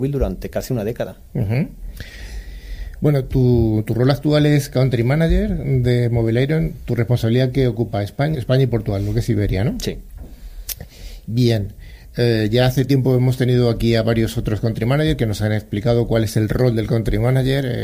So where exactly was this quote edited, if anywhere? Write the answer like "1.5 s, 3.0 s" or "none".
8.3 s